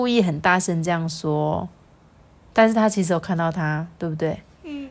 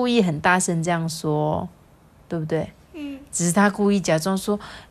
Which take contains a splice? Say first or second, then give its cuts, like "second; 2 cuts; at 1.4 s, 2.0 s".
second; 1 cut; at 2.3 s